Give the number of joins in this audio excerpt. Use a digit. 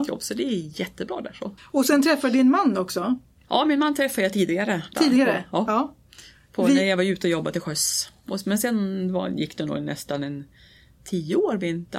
1